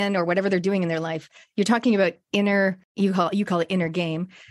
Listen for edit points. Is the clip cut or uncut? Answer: cut